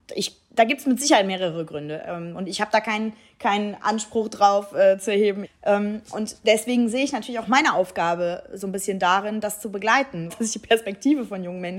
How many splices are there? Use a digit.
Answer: 2